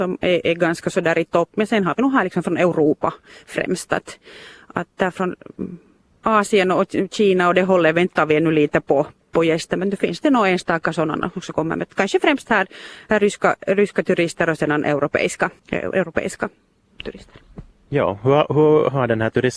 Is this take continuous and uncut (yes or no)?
no